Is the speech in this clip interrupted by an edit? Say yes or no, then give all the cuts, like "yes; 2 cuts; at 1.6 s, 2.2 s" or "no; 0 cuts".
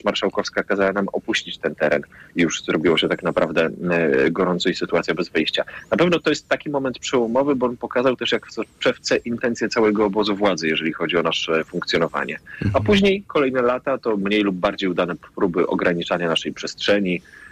no; 0 cuts